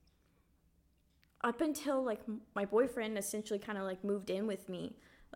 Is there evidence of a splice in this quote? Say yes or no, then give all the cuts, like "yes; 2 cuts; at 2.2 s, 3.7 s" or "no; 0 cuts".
no; 0 cuts